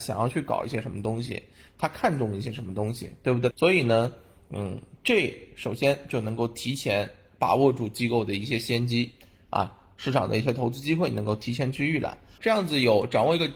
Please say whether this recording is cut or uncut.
cut